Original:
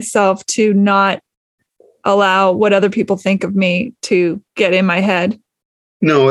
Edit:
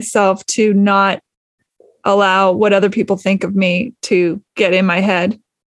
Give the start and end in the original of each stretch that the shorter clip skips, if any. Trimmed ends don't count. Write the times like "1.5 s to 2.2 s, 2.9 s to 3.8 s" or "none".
none